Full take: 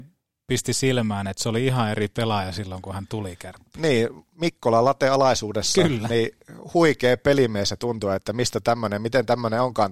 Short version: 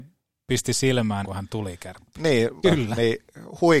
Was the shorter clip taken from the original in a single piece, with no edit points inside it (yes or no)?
no